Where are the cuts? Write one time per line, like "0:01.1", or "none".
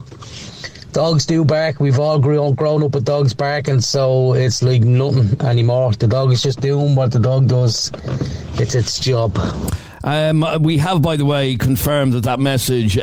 none